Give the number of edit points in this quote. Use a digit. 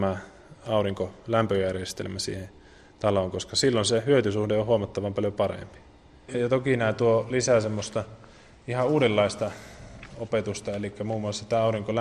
1